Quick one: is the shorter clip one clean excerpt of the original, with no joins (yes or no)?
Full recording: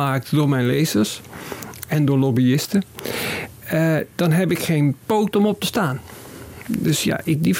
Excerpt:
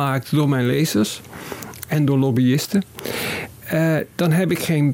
yes